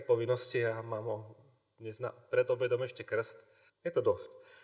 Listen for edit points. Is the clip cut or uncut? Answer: cut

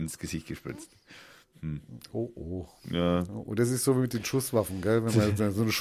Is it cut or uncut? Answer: uncut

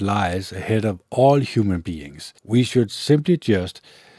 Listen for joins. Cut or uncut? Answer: cut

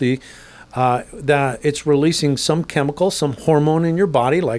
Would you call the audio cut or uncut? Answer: uncut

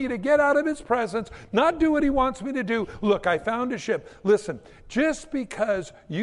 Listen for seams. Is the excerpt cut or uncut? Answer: uncut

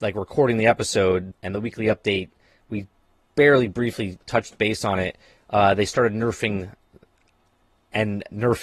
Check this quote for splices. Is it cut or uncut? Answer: cut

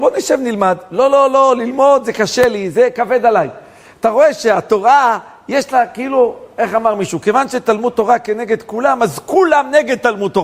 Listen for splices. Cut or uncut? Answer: uncut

